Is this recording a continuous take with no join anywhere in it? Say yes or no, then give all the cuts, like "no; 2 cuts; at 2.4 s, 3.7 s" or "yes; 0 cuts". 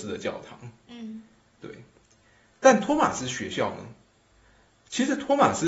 yes; 0 cuts